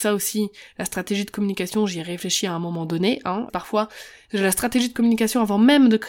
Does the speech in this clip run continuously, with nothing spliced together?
no; 1 cut; at 3.5 s

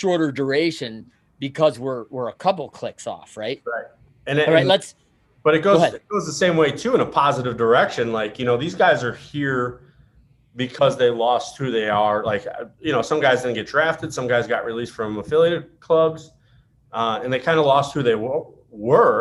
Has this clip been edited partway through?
no; 0 cuts

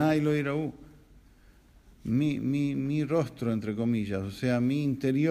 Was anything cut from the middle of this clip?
no; 0 cuts

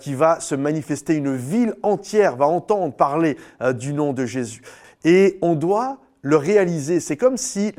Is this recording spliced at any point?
yes; 1 cut; at 4.8 s

